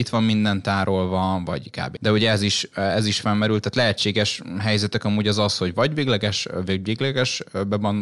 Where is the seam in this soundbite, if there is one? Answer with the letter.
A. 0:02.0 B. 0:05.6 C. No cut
A